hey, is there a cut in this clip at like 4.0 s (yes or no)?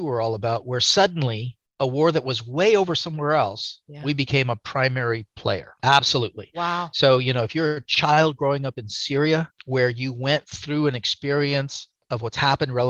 no